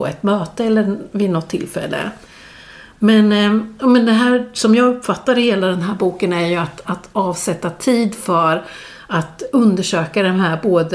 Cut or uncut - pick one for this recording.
cut